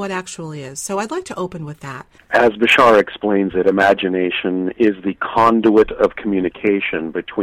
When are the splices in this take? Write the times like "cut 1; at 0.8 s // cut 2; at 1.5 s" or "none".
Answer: cut 1; at 2.2 s